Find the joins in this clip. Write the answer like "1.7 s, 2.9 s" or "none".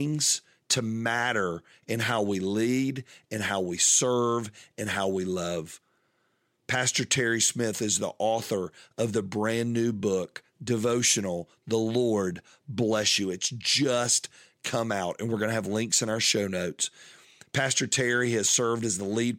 none